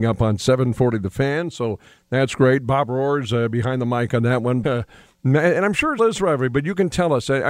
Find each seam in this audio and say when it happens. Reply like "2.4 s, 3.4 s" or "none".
4.6 s, 6.0 s